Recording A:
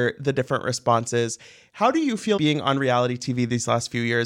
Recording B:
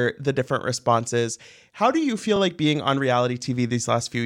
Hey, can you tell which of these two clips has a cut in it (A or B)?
A